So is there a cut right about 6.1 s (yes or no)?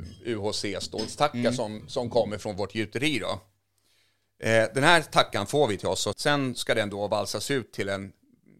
yes